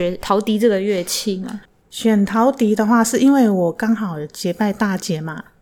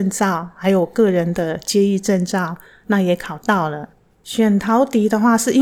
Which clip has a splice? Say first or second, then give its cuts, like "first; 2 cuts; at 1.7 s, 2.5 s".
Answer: second; 1 cut; at 4.1 s